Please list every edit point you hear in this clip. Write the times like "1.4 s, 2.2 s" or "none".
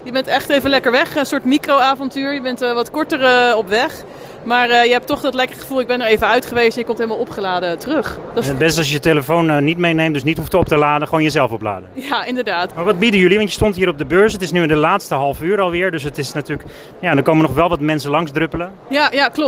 12.7 s